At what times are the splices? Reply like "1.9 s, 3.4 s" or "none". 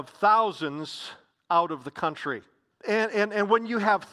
2.7 s